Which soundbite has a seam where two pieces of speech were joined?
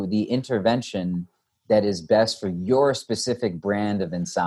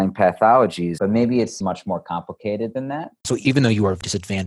second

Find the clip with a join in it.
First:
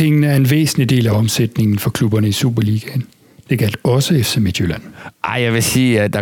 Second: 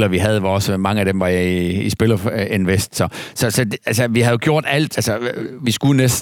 second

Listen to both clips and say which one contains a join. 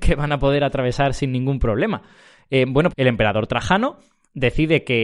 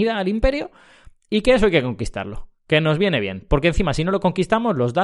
first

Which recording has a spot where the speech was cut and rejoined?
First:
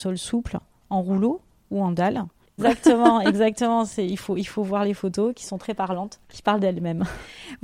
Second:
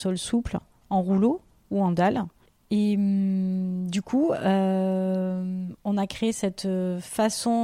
first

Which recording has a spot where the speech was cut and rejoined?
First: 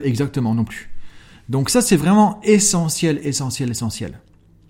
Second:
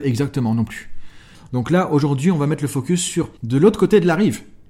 second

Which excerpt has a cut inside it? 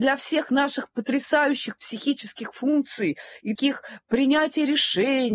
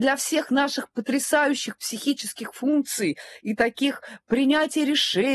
first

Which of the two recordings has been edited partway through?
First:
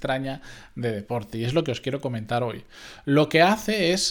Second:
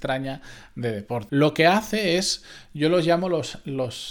second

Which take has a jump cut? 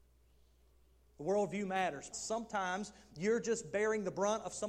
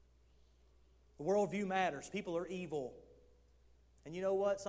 first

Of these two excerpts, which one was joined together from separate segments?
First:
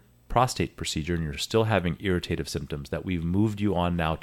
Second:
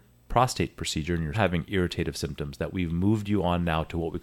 second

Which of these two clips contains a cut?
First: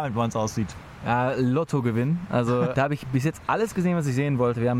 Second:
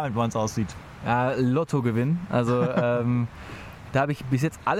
first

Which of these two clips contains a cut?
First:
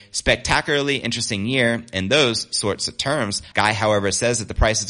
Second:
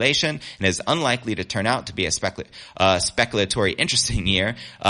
first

